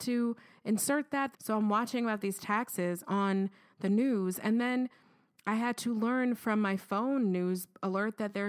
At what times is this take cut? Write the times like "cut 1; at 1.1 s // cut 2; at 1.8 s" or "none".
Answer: cut 1; at 1.3 s